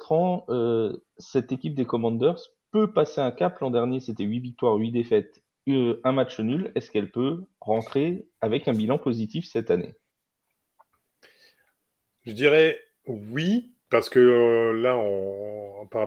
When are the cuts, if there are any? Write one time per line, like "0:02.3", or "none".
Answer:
0:13.8